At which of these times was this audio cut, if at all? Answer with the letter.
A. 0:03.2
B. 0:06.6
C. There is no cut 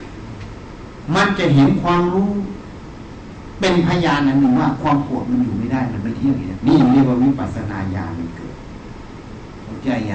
B